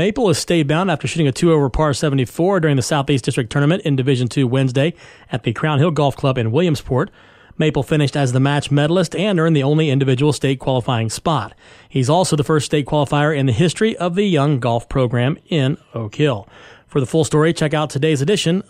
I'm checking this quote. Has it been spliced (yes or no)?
no